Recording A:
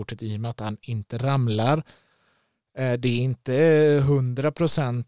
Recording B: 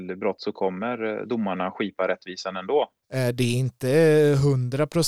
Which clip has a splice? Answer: B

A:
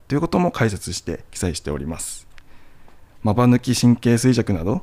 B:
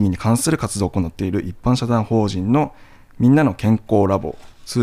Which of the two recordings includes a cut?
A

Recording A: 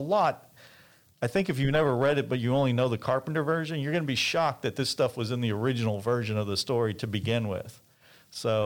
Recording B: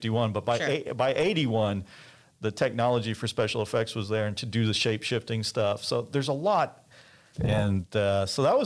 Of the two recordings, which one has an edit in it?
B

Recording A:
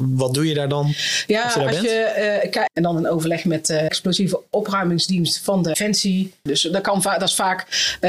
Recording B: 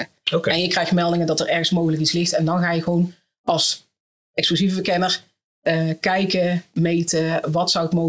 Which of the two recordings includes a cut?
A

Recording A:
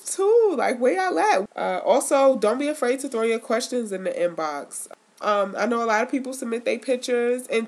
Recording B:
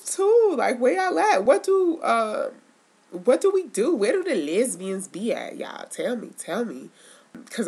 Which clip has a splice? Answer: A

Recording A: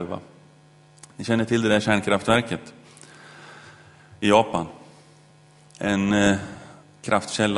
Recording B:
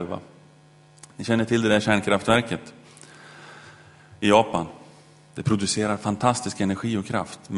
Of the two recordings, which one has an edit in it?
B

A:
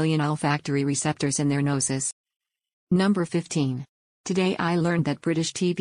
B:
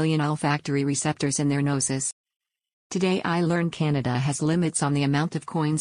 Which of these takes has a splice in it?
B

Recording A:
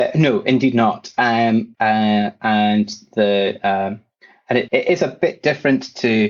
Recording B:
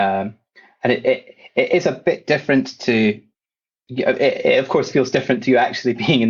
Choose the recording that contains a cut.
A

